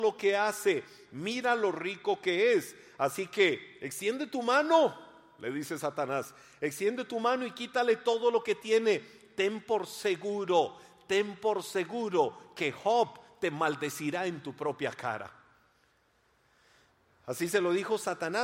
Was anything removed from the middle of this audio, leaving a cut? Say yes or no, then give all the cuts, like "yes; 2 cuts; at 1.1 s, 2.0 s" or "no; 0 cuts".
no; 0 cuts